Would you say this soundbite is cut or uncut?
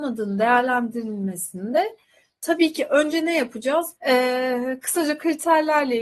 cut